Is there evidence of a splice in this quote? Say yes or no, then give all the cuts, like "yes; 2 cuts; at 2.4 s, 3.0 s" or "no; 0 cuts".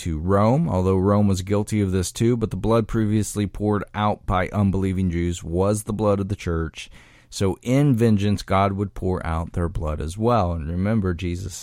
no; 0 cuts